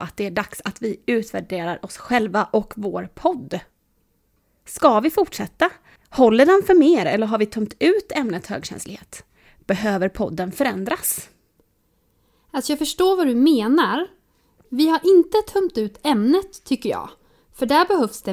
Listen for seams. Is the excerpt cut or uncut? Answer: cut